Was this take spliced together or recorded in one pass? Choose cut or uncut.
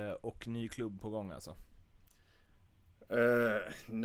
uncut